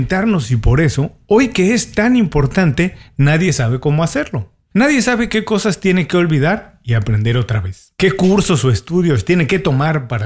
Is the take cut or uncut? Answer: uncut